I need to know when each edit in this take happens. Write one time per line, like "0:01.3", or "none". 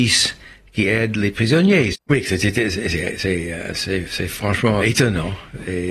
0:01.9
0:04.8